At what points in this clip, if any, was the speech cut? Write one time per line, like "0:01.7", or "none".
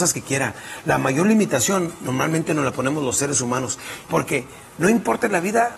0:04.1